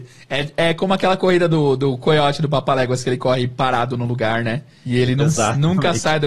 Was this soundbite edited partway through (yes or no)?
no